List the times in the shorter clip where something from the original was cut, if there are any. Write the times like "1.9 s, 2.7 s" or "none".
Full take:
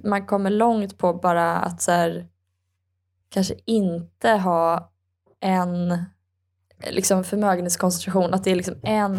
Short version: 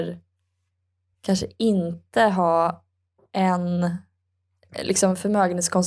none